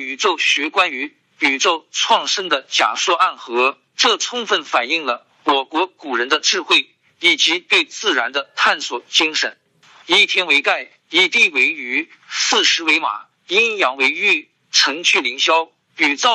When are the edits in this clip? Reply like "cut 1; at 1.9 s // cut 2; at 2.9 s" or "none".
cut 1; at 10.0 s